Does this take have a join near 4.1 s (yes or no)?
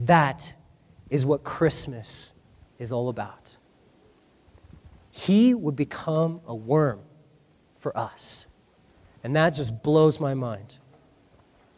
no